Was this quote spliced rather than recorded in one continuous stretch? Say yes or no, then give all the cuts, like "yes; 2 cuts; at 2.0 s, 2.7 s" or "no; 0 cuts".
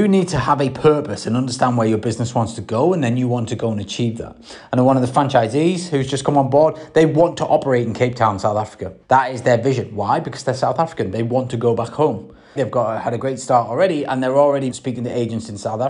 yes; 3 cuts; at 9.0 s, 12.6 s, 14.7 s